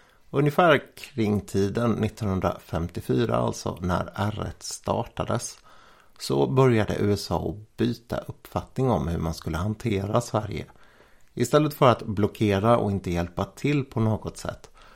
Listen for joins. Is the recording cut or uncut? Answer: uncut